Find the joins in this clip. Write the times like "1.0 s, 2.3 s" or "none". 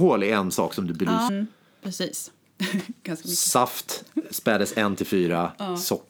1.3 s